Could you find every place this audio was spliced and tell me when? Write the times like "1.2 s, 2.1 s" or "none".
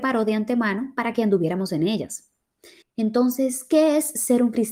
2.8 s